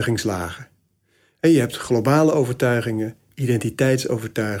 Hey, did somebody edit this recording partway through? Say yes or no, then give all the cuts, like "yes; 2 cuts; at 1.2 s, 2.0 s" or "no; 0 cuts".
no; 0 cuts